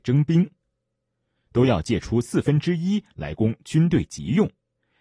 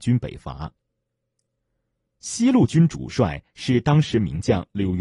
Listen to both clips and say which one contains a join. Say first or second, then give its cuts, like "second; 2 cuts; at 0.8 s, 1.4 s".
first; 1 cut; at 1.5 s